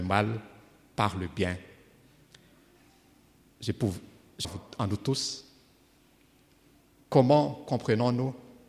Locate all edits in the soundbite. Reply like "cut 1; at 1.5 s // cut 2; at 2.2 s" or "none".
cut 1; at 4.4 s